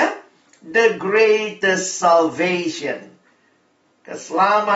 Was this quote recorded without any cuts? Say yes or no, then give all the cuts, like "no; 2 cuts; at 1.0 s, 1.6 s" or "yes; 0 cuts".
yes; 0 cuts